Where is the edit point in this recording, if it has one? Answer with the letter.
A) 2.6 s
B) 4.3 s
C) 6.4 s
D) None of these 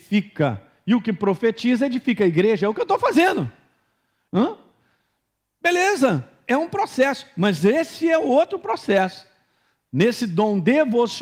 B